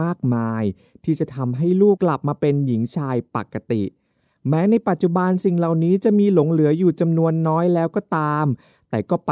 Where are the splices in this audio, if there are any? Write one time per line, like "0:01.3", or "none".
0:02.0